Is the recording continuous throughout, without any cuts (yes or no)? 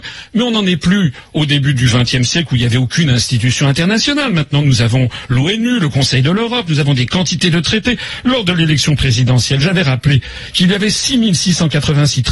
yes